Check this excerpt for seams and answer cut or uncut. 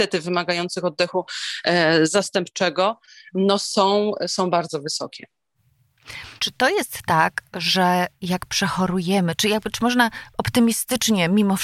cut